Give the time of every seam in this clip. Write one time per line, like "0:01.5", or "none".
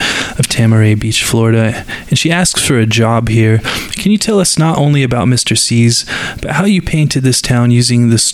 none